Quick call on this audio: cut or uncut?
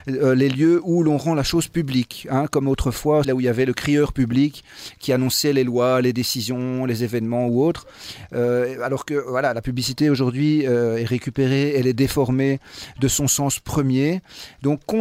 cut